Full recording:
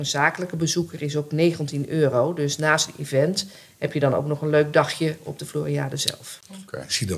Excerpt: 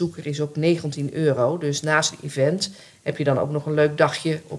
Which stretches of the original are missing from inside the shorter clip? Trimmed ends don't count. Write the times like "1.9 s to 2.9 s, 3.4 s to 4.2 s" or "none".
none